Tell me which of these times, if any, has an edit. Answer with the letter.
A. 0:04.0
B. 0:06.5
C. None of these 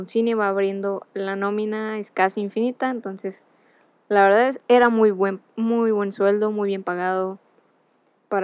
C